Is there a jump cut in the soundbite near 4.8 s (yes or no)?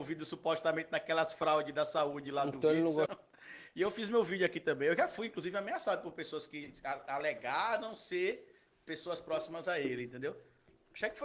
no